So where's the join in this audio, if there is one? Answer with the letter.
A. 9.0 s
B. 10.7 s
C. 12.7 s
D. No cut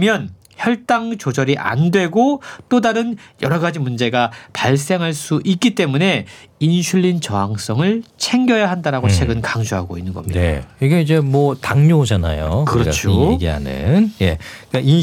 D